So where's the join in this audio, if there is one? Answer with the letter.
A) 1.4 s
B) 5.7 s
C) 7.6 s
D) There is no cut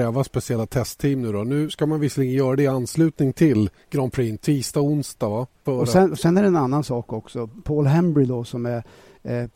B